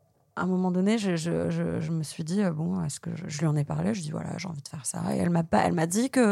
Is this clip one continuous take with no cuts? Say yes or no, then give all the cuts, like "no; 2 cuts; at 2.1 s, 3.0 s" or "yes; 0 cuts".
yes; 0 cuts